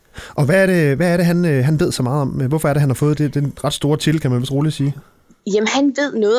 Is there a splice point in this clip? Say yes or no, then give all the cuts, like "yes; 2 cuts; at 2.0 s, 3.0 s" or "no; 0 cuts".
no; 0 cuts